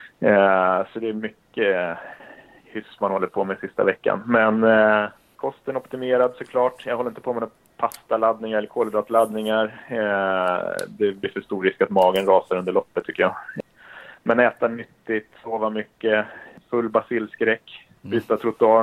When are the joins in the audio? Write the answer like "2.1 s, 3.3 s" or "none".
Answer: none